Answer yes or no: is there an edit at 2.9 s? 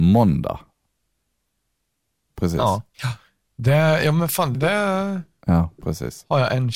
yes